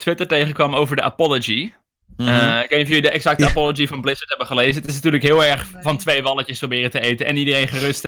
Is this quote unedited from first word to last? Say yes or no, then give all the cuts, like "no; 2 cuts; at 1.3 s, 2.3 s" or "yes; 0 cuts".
yes; 0 cuts